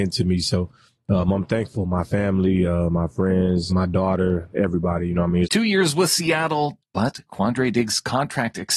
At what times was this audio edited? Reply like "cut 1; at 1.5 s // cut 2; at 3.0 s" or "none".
cut 1; at 3.7 s // cut 2; at 5.4 s // cut 3; at 6.8 s